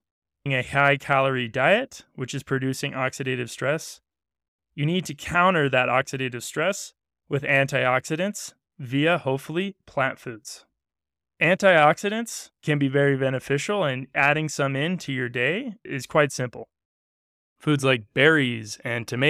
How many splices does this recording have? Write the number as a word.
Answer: zero